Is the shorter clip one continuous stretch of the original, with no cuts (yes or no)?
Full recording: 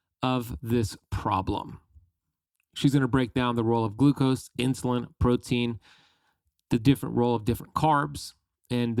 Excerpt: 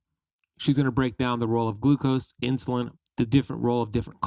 no